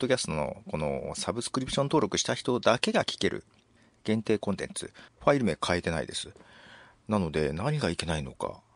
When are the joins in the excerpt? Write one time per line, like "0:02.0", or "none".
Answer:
0:05.1